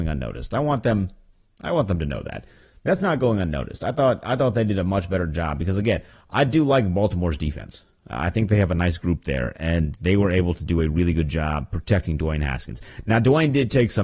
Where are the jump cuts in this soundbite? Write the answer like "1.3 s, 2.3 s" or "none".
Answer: none